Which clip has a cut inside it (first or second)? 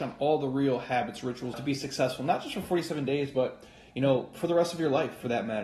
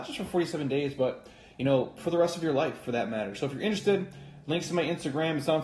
first